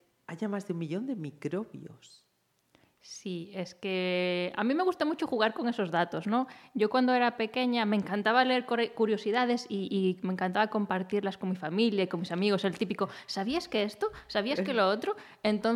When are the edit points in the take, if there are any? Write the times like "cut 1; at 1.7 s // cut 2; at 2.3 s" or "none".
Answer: none